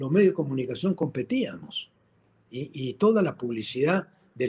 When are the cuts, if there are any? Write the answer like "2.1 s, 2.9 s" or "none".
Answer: none